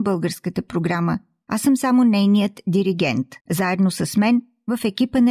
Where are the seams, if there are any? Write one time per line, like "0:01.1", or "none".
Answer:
0:03.4